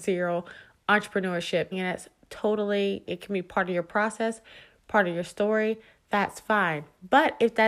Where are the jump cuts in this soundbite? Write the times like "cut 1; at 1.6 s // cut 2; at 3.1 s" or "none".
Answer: cut 1; at 1.7 s // cut 2; at 3.1 s